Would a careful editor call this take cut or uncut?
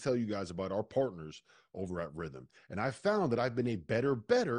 cut